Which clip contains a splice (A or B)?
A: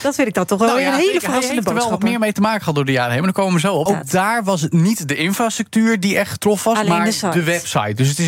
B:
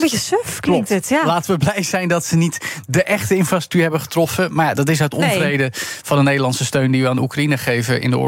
A